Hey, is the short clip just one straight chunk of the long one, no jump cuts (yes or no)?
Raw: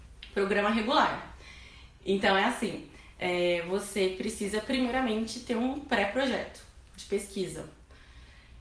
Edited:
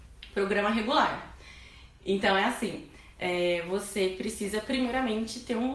yes